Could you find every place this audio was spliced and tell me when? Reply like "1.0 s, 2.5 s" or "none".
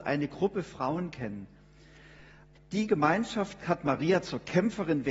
2.6 s